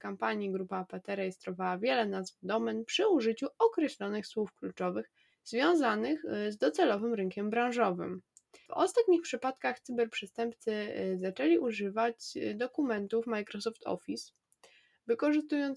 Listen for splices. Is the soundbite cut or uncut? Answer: cut